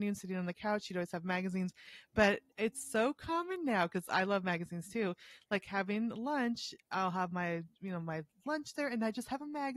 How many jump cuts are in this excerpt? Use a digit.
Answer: 0